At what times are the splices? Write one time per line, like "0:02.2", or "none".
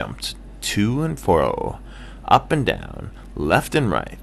none